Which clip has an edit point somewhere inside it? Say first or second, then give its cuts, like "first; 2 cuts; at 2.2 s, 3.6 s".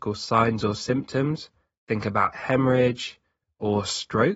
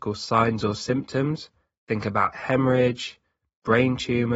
first; 1 cut; at 3.4 s